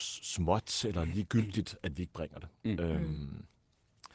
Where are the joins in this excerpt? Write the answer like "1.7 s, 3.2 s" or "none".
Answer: 1.8 s